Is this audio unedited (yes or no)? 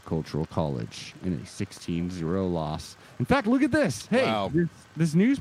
yes